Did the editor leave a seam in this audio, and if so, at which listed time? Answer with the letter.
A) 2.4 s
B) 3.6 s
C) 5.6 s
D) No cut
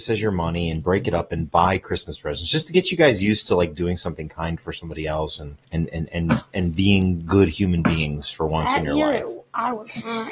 C